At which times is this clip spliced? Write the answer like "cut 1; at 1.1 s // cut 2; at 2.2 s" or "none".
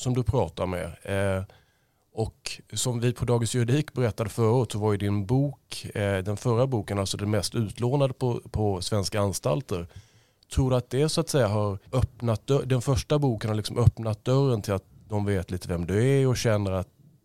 cut 1; at 11.9 s